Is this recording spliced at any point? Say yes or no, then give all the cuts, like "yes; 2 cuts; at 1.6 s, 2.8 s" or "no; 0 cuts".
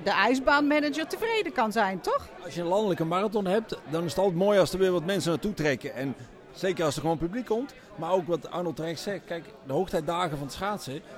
yes; 1 cut; at 2.4 s